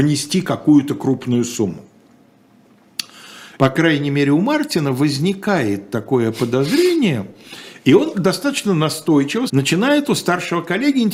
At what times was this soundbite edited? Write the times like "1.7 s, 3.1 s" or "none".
3.5 s, 8.1 s, 9.5 s